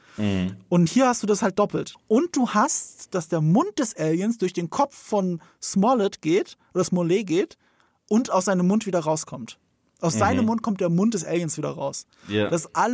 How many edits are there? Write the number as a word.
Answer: one